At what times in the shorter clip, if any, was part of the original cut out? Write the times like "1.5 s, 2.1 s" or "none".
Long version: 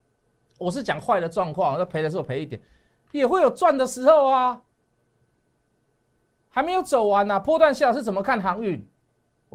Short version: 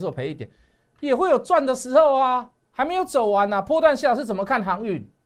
2.6 s